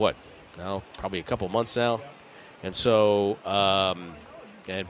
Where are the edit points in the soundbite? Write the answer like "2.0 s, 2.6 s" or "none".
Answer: none